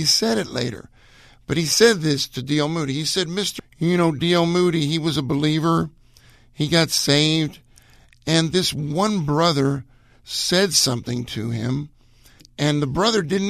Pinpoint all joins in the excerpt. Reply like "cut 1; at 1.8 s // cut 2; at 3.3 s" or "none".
cut 1; at 3.6 s